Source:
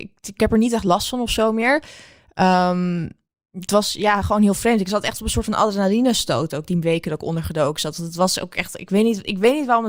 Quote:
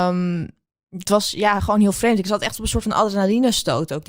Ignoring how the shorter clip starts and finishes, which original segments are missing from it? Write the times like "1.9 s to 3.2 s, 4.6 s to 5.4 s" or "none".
none